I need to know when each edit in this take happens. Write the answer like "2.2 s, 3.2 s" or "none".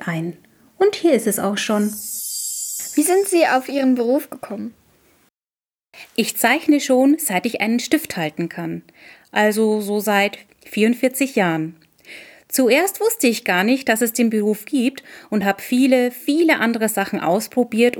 none